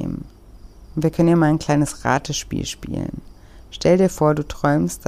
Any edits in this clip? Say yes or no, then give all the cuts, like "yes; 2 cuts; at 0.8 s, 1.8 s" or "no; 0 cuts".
no; 0 cuts